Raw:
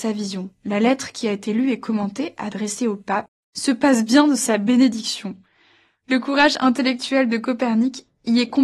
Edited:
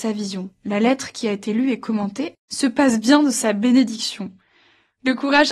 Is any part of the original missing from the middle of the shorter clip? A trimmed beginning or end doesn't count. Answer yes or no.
yes